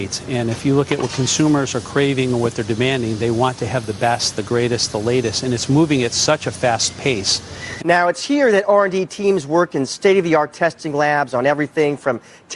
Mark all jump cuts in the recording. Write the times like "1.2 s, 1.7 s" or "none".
7.8 s